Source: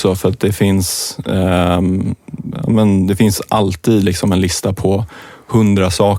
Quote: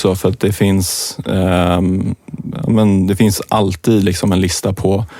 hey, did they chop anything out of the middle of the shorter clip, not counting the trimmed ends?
no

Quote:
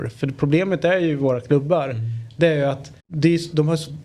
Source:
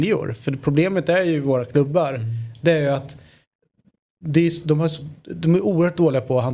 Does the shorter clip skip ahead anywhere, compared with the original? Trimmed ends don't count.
yes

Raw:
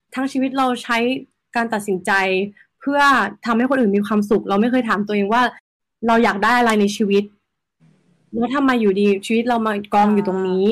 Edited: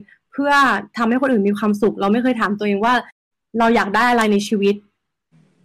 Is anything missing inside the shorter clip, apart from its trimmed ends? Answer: no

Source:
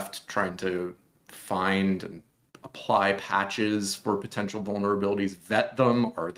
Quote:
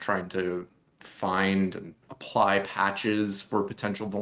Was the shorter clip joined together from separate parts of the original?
yes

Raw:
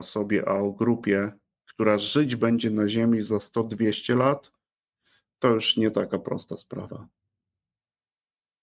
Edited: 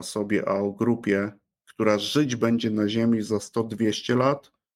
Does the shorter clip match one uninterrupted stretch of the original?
yes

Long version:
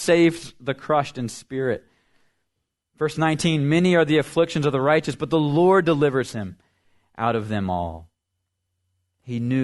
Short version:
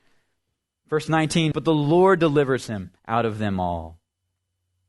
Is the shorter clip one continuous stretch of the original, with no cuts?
no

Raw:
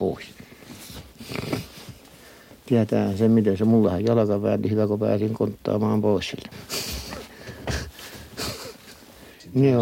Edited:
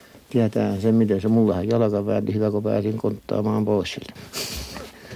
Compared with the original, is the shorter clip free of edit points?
yes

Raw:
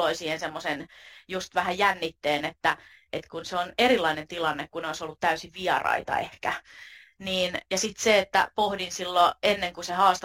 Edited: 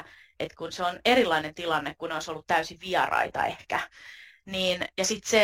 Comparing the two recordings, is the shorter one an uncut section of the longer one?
yes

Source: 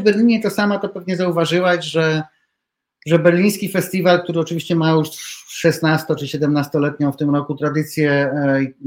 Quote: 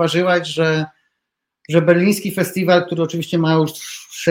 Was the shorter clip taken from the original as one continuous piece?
yes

